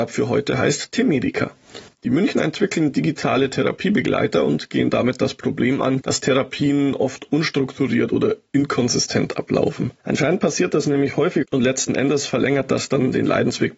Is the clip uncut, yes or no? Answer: no